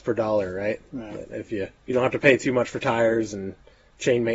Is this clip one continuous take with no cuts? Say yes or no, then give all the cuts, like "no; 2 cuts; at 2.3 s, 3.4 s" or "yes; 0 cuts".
no; 1 cut; at 1.8 s